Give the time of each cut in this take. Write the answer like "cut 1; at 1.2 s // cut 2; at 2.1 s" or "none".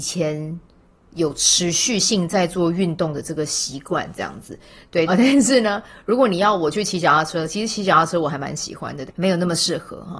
cut 1; at 5.1 s // cut 2; at 9.1 s